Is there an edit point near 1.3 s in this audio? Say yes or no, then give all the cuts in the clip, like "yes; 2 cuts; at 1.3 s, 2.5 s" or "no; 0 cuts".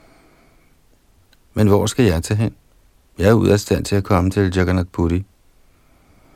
yes; 1 cut; at 1.3 s